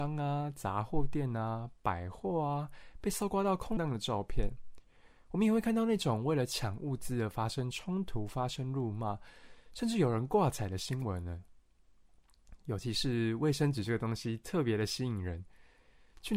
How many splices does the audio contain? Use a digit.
1